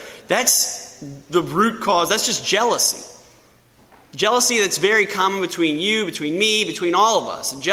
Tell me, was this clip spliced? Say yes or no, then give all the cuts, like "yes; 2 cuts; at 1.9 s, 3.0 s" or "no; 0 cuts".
no; 0 cuts